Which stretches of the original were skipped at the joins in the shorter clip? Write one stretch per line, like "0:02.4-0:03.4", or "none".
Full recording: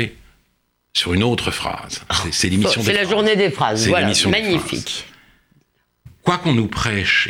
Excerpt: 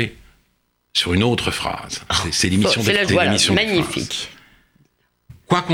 0:03.1-0:03.8